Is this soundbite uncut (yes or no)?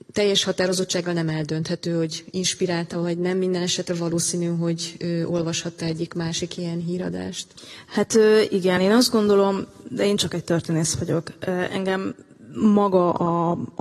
yes